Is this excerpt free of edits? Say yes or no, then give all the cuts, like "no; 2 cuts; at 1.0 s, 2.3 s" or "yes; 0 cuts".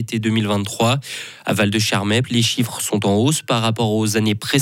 no; 1 cut; at 2.2 s